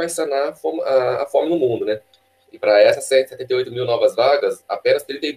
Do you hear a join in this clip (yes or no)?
yes